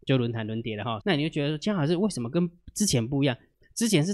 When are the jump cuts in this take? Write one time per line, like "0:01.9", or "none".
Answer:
0:01.0